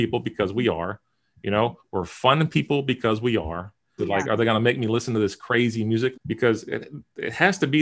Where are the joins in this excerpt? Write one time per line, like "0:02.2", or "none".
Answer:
0:04.0
0:06.1